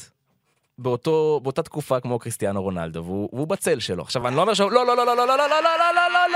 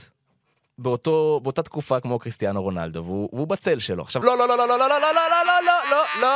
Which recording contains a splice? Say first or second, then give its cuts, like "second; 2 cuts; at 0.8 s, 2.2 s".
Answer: second; 2 cuts; at 4.2 s, 5.5 s